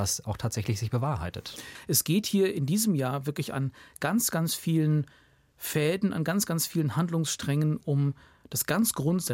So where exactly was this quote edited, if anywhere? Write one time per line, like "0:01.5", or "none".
none